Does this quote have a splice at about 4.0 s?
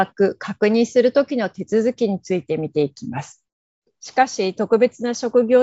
yes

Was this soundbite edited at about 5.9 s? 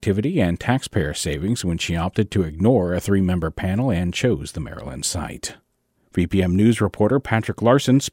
yes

